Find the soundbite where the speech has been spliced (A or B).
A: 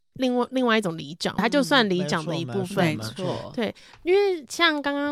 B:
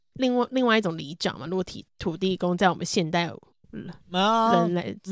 A